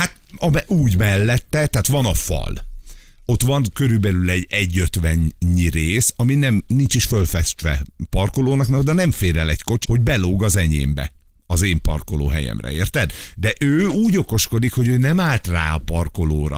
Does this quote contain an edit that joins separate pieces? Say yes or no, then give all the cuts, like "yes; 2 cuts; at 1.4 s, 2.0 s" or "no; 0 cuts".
yes; 1 cut; at 9.8 s